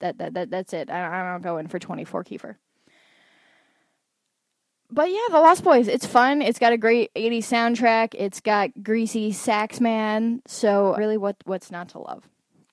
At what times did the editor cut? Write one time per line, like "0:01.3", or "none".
0:11.0